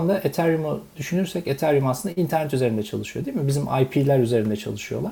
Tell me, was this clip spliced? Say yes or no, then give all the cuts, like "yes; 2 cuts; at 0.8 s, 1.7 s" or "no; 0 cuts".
no; 0 cuts